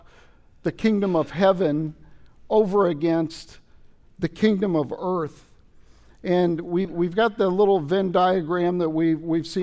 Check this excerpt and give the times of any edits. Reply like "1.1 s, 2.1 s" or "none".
none